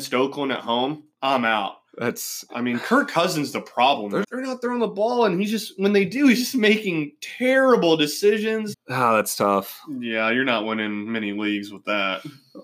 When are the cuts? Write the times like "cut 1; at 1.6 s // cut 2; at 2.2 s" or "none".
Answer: cut 1; at 1.1 s // cut 2; at 4.2 s // cut 3; at 8.7 s